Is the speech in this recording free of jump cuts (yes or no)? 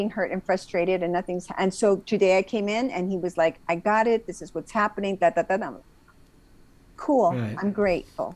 yes